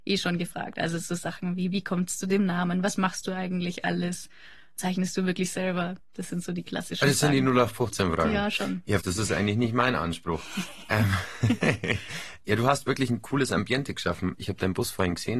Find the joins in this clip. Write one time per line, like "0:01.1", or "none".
0:09.0